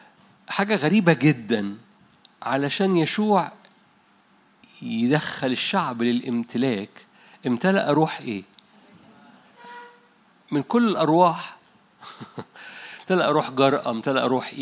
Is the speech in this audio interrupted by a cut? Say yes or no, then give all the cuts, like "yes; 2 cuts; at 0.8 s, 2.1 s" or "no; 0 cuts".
no; 0 cuts